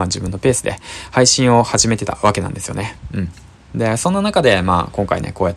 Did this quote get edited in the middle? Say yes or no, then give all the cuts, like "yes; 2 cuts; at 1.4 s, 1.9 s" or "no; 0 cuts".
no; 0 cuts